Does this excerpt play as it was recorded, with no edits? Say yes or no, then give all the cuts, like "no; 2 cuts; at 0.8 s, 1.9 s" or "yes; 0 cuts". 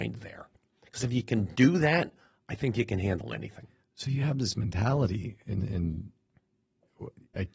yes; 0 cuts